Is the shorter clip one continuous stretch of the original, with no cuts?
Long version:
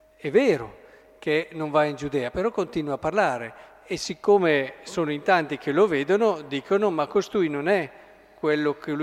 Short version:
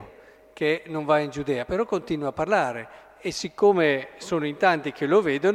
yes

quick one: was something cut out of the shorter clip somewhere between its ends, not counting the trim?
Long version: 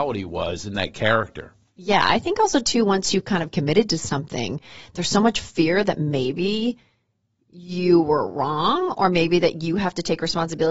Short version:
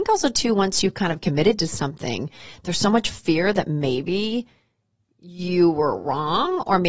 no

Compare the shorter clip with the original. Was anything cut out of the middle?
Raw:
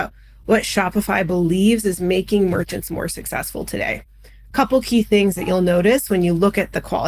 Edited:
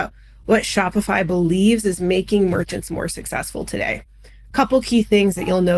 no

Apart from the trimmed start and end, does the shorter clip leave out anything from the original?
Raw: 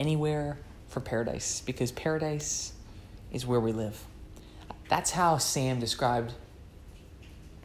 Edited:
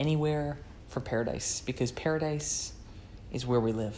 no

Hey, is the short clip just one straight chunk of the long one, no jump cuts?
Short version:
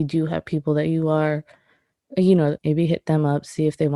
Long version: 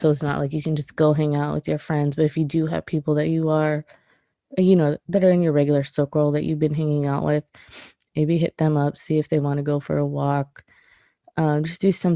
no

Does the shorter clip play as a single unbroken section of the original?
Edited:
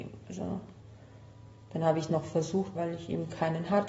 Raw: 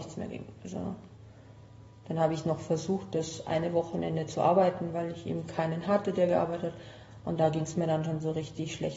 no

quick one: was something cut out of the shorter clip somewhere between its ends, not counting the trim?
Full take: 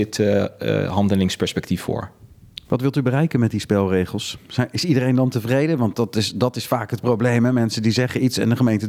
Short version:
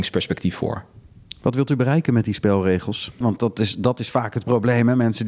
yes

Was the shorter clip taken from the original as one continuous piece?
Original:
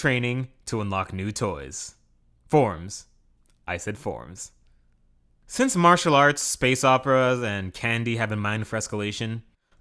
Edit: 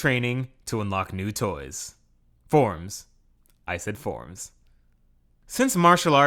yes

